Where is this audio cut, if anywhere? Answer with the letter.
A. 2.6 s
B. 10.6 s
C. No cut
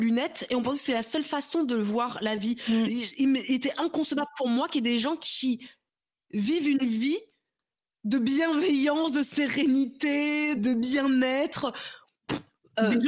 B